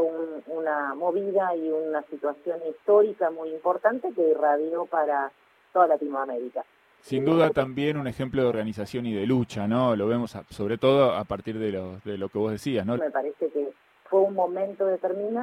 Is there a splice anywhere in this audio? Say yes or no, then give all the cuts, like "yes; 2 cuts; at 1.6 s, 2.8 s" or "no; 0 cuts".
yes; 1 cut; at 13.0 s